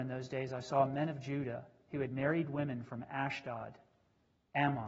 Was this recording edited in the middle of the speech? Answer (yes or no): no